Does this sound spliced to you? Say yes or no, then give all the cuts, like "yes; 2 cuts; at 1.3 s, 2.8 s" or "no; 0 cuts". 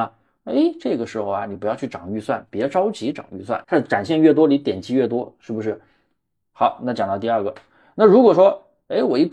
yes; 1 cut; at 3.6 s